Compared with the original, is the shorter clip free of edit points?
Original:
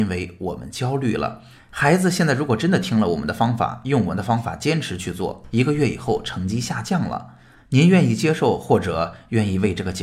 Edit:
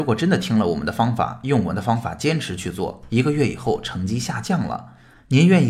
yes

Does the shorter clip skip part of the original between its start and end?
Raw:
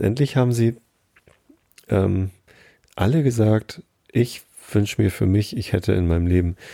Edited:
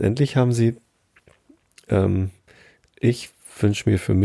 yes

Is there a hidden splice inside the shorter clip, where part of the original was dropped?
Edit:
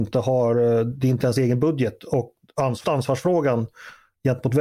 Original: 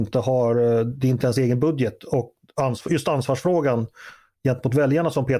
yes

